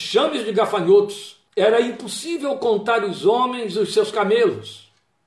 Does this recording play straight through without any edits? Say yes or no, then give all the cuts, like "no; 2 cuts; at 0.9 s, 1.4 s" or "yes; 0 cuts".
no; 1 cut; at 1.5 s